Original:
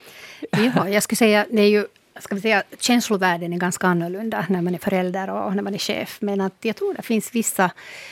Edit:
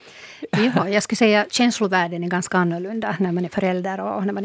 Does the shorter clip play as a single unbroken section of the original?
no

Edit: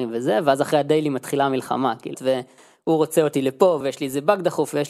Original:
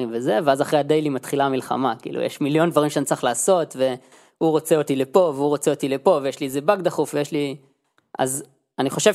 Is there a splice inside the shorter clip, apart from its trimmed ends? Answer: yes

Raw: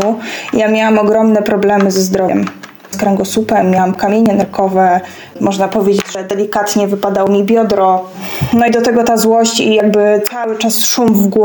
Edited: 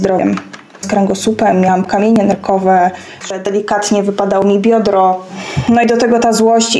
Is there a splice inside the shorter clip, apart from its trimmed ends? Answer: yes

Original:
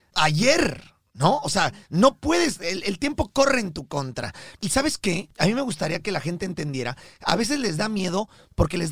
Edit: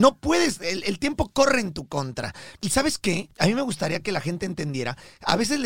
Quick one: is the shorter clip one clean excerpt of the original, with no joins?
yes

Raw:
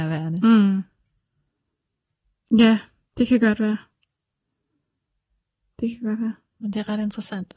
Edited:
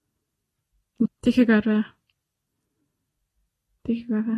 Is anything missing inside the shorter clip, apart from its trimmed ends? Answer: yes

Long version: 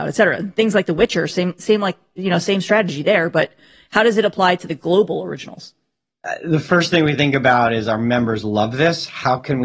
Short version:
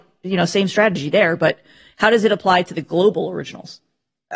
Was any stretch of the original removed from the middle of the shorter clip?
no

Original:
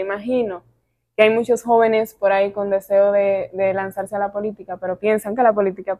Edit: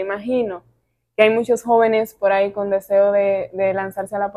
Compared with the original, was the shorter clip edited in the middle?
no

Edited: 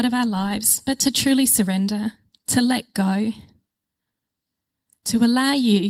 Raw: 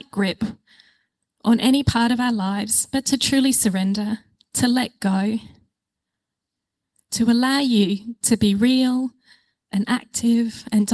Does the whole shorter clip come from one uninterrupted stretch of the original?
yes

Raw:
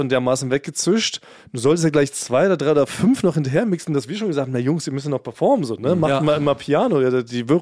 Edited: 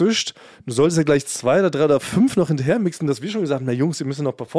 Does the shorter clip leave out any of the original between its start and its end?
no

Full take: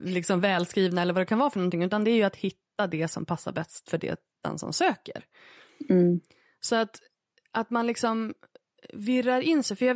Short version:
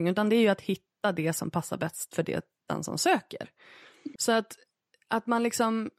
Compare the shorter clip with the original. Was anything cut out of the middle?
yes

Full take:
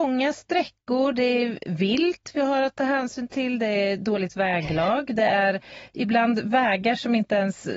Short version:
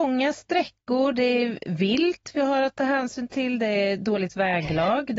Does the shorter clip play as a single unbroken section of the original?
yes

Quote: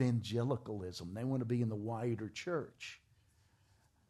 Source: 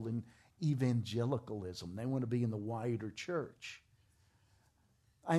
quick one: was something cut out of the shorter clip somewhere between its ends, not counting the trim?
no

